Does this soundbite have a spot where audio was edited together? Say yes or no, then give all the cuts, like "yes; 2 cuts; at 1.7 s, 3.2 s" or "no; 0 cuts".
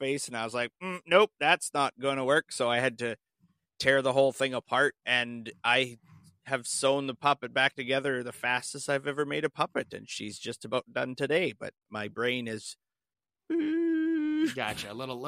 no; 0 cuts